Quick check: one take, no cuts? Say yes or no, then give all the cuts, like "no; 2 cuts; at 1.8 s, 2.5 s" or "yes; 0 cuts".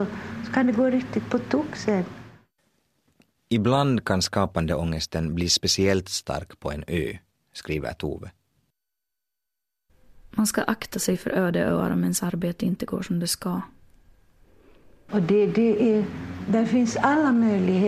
no; 1 cut; at 15.1 s